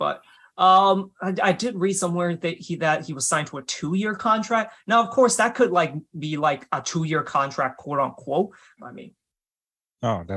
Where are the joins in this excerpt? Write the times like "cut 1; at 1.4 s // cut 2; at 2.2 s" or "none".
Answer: cut 1; at 8.8 s